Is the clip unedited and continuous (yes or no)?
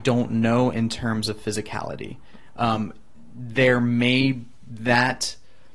yes